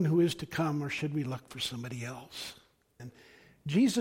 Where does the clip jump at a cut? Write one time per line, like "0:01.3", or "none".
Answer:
0:03.0